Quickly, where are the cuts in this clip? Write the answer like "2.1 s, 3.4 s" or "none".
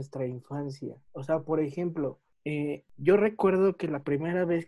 none